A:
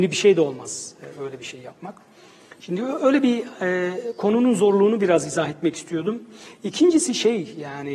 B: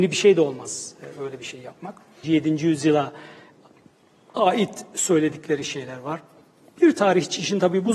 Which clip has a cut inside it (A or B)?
B